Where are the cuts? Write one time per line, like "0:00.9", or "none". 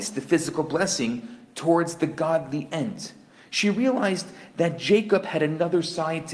none